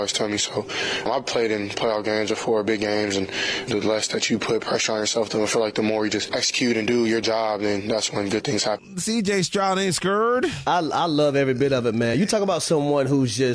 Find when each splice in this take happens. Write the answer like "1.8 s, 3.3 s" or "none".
none